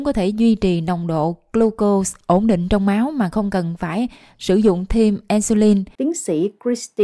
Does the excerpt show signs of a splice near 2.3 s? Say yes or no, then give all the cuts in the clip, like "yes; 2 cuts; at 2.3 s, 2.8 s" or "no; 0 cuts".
no; 1 cut; at 5.9 s